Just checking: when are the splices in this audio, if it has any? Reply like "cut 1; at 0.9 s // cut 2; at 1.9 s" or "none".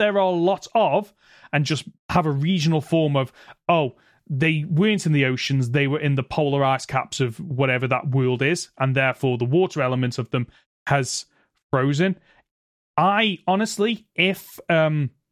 none